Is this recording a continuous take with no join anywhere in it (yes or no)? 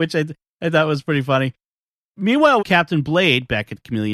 no